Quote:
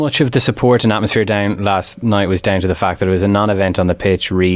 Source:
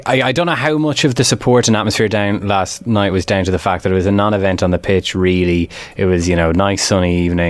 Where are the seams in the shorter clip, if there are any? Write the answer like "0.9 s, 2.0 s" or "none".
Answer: none